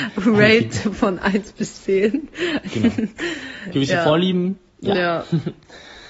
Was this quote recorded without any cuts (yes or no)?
yes